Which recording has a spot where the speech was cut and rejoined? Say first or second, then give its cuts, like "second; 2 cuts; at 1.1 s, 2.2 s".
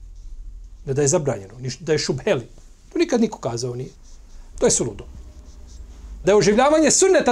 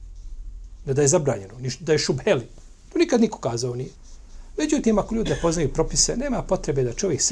first; 2 cuts; at 4.5 s, 6.2 s